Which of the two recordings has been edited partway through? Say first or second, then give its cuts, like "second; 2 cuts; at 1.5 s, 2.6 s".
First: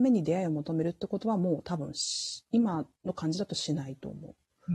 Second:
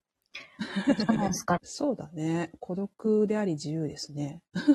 second; 1 cut; at 1.6 s